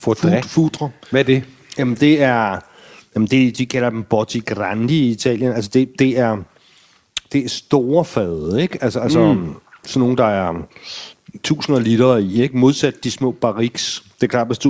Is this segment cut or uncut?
uncut